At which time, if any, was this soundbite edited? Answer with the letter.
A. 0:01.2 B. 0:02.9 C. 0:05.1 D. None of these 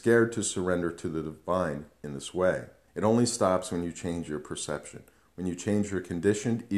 B